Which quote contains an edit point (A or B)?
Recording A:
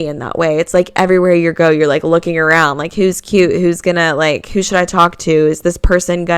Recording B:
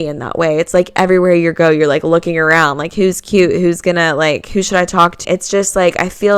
B